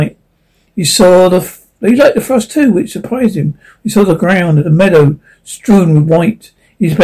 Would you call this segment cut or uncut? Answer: uncut